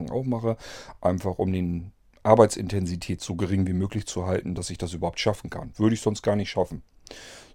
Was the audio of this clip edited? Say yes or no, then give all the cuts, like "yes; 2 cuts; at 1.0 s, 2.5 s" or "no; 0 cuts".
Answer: no; 0 cuts